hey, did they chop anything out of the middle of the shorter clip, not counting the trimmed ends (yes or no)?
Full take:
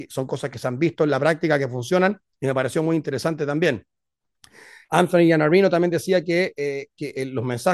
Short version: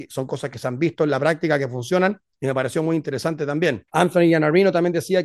yes